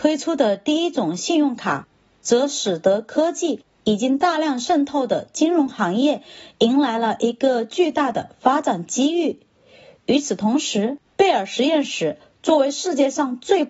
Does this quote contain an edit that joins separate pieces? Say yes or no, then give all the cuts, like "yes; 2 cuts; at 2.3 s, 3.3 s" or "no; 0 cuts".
yes; 1 cut; at 11.1 s